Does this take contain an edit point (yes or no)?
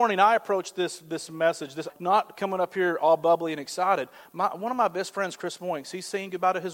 yes